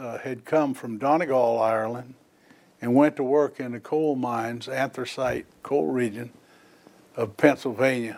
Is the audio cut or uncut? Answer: uncut